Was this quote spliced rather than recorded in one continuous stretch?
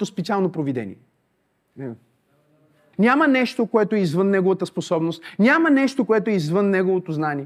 yes; 1 cut; at 2.9 s

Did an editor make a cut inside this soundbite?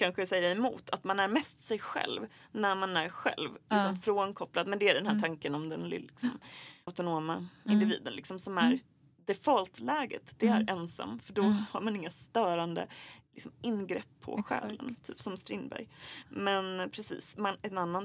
yes; 1 cut; at 6.9 s

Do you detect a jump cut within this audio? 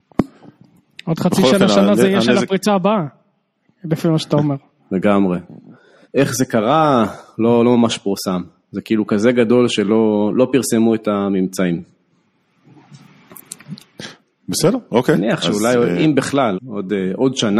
yes; 2 cuts; at 6.0 s, 16.5 s

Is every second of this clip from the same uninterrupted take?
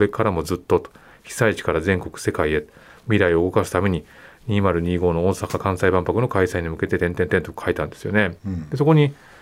no; 1 cut; at 8.4 s

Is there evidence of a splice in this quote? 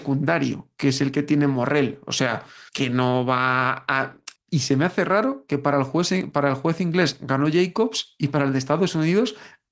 yes; 2 cuts; at 2.7 s, 4.4 s

